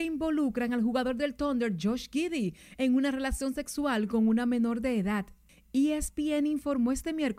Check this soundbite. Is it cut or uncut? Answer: uncut